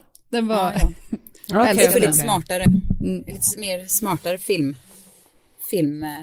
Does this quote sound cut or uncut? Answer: uncut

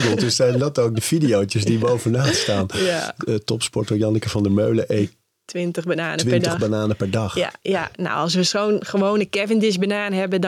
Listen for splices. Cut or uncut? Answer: uncut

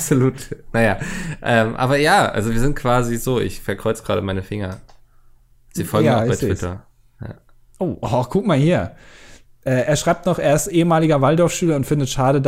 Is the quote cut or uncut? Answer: uncut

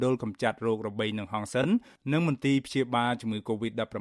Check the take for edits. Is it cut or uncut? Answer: uncut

